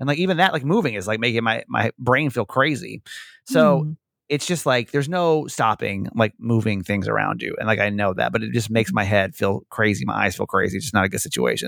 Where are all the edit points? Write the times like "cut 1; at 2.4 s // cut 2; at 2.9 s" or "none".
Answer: none